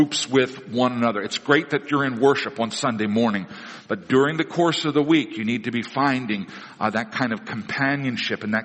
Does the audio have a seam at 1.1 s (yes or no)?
no